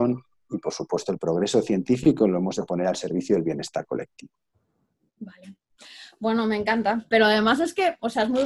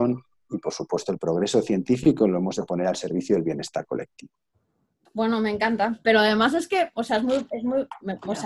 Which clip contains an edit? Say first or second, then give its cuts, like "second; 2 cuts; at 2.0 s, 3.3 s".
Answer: second; 1 cut; at 5.1 s